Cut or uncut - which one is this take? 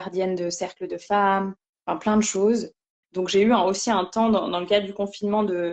cut